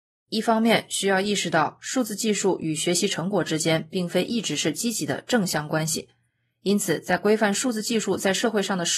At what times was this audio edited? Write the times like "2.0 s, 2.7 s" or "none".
5.7 s